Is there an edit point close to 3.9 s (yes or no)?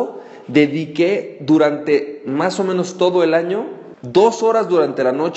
yes